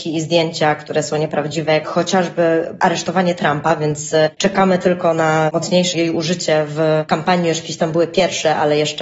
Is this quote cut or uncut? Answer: uncut